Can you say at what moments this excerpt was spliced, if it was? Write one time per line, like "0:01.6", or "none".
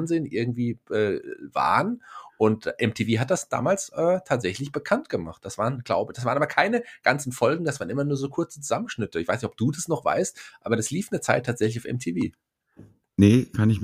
none

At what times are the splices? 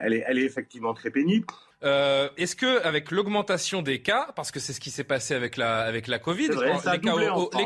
0:01.7

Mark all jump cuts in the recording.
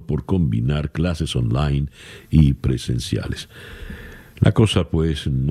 none

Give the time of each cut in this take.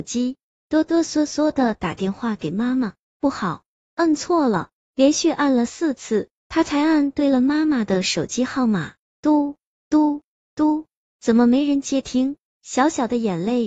0:04.8

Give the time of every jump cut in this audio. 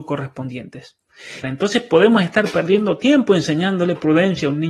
0:01.4

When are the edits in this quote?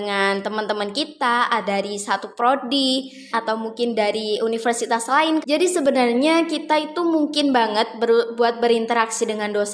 0:03.3
0:05.4

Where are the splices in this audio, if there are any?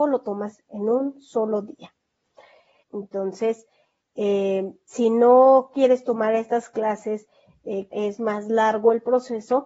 0:02.8
0:07.9

